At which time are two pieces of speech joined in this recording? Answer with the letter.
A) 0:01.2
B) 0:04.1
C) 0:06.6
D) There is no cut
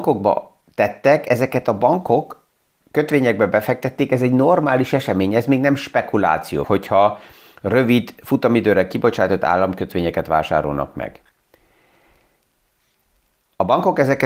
C